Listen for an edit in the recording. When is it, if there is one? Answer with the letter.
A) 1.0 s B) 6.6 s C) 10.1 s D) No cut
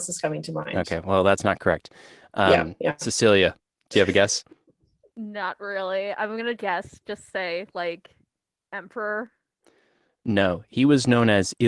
B